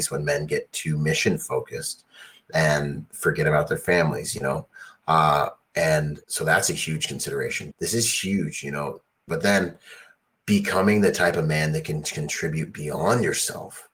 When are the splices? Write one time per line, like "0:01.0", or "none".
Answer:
0:06.2
0:07.7
0:09.3